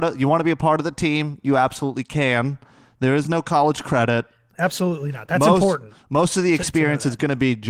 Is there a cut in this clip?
yes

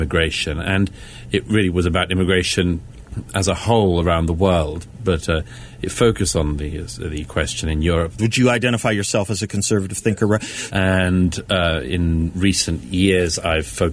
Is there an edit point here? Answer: yes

